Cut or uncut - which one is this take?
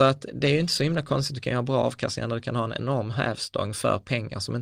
uncut